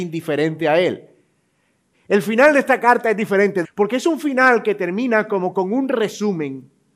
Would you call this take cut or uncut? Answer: cut